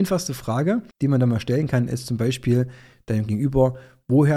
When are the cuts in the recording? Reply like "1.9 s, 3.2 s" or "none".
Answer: 0.9 s